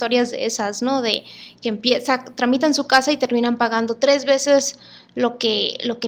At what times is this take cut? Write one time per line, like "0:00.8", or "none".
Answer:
none